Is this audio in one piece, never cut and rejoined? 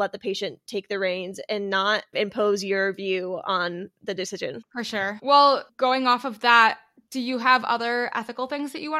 yes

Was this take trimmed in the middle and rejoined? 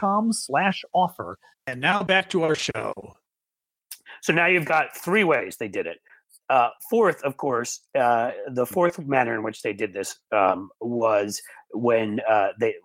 yes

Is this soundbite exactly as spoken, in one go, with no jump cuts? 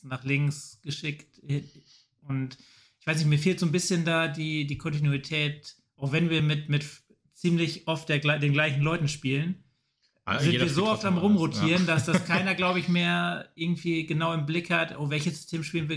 yes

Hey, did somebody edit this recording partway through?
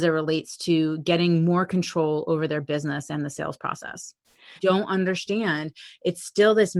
yes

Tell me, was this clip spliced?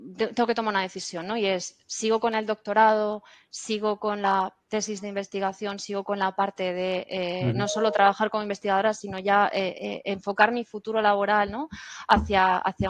no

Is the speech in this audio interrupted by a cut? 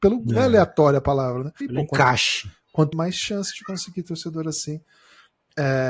yes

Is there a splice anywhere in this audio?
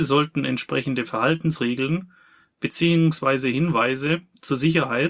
no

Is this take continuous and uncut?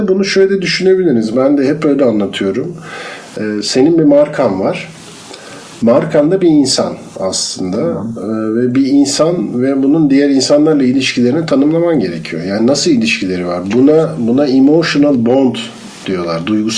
yes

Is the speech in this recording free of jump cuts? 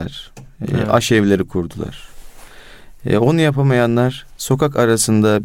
yes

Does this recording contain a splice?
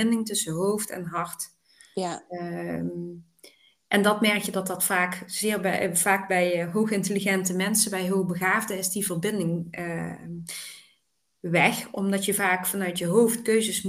no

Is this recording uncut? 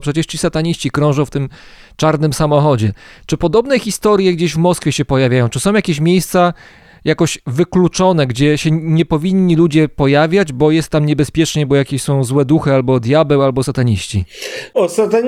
yes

